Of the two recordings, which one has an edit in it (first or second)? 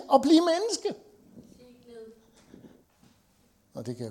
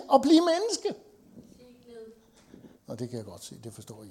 second